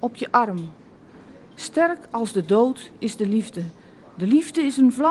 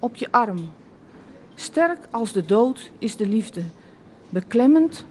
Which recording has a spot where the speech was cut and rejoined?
first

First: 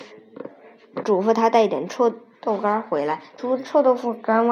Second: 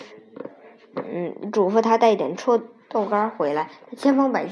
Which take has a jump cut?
first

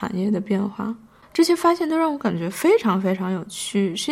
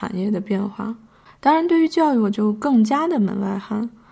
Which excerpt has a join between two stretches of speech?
first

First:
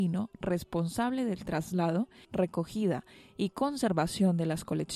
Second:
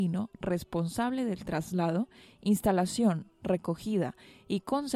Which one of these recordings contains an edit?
first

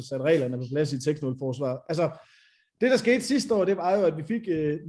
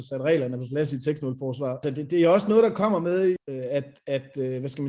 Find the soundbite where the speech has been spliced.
second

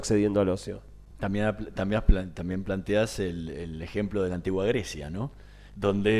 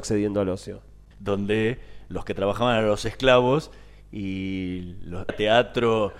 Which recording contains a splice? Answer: second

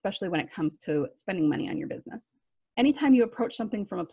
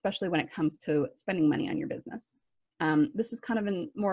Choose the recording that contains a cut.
first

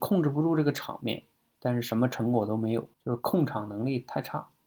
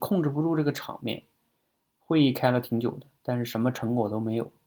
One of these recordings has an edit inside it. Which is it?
first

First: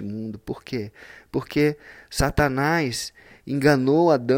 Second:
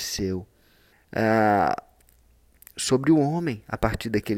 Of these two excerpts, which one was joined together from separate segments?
second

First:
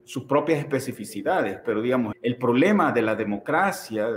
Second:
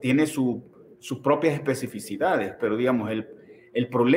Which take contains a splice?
first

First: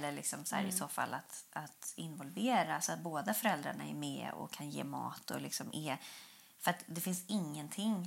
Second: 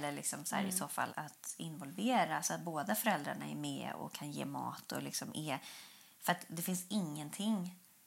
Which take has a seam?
second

